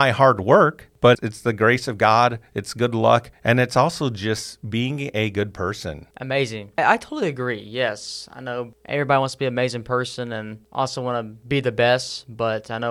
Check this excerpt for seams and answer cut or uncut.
uncut